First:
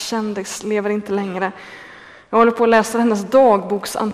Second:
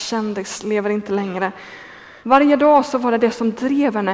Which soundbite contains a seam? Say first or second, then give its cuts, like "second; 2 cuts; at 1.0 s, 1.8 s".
second; 1 cut; at 2.2 s